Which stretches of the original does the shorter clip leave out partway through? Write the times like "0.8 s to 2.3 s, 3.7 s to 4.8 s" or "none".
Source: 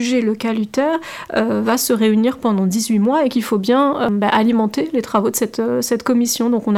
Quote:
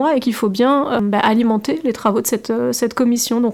none